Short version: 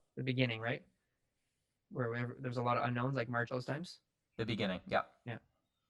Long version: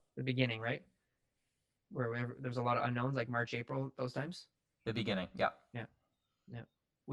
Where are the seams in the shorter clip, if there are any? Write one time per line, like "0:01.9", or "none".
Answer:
0:03.5

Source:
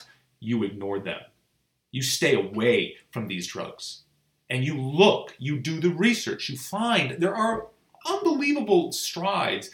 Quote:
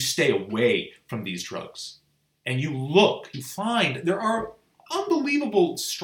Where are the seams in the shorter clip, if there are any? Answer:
0:03.3

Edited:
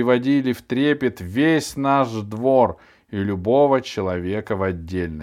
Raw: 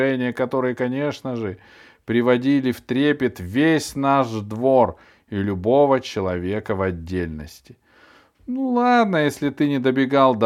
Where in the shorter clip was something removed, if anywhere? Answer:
none

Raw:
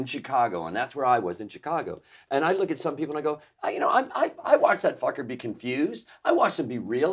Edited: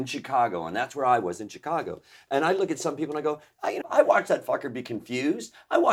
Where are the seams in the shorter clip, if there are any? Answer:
0:03.8

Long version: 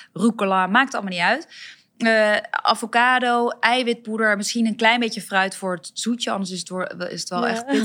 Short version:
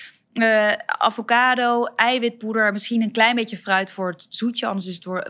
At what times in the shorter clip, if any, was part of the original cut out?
none

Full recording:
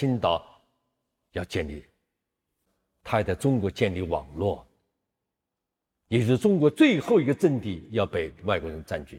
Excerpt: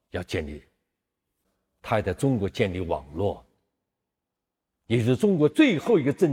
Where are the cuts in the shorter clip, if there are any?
none

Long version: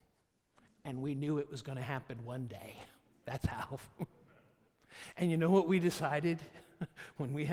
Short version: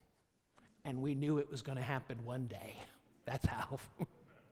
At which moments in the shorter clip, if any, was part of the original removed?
none

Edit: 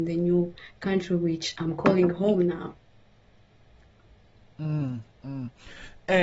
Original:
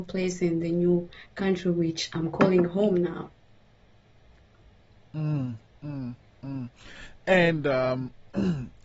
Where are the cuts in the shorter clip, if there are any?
0:05.2

